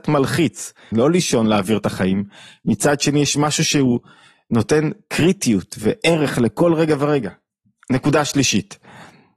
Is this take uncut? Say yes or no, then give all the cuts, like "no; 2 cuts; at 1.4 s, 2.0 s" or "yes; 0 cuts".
no; 1 cut; at 0.9 s